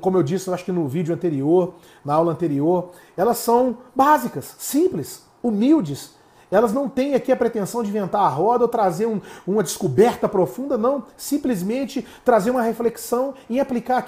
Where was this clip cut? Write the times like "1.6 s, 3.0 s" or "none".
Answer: none